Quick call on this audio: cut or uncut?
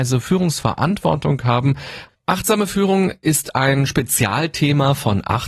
cut